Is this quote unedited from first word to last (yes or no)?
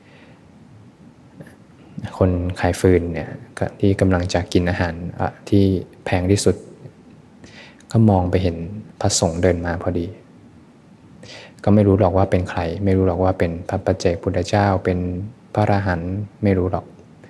yes